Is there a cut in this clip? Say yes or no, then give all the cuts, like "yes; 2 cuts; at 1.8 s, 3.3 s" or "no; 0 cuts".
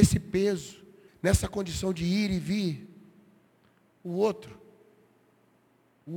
yes; 1 cut; at 1.1 s